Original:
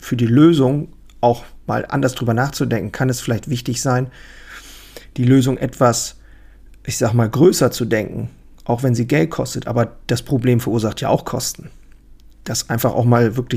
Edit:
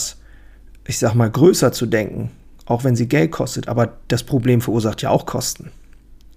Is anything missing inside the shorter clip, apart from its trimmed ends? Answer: no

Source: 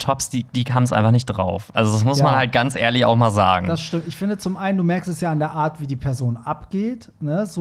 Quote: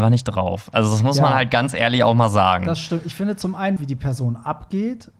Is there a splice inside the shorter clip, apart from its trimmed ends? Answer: yes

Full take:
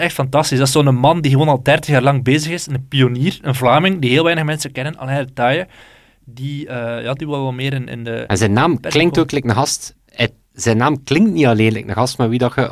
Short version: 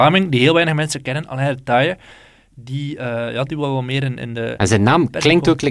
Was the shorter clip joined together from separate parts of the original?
no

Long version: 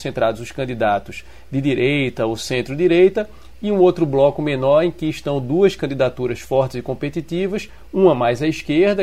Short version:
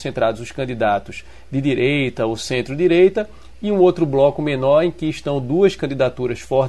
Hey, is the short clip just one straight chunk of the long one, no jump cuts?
yes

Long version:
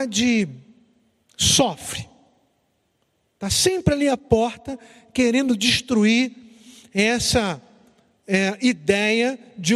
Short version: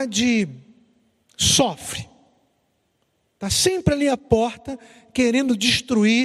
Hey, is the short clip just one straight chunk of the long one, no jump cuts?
yes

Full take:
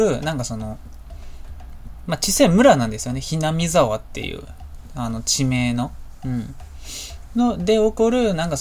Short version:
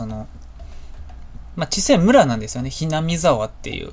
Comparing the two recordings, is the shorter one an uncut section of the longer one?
yes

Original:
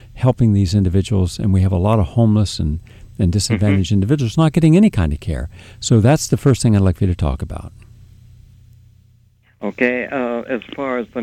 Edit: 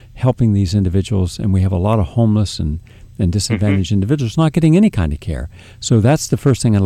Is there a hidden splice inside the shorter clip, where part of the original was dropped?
no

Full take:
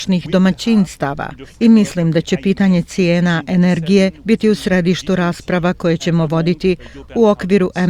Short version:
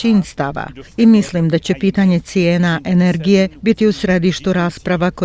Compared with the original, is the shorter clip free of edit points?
yes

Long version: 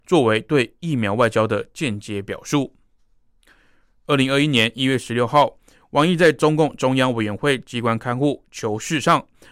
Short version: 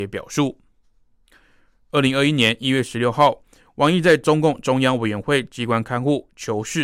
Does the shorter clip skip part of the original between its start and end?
no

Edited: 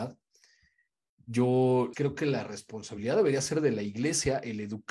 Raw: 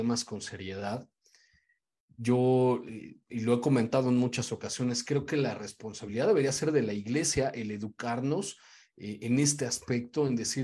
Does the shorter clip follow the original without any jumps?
no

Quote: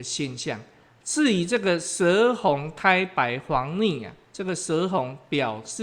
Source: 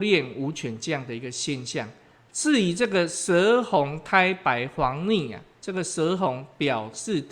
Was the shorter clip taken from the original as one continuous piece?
yes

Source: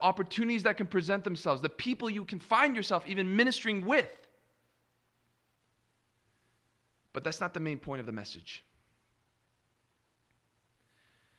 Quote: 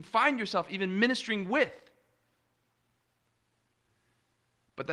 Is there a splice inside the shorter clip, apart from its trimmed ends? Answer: no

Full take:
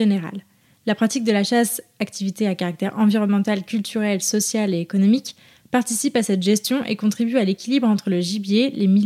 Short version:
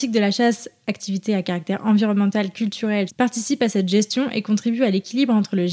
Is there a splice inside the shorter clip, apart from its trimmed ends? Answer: yes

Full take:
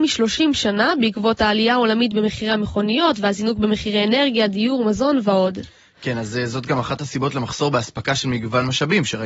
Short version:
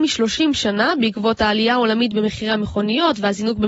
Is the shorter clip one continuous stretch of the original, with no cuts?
yes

